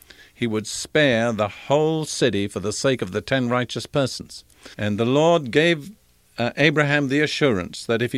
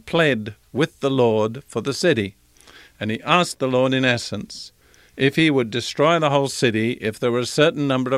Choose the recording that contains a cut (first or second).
first